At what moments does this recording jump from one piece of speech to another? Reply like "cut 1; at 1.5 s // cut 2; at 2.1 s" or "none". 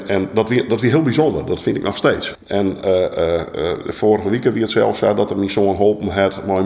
cut 1; at 2.3 s